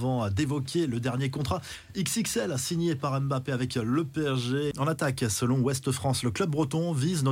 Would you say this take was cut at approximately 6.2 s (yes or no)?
no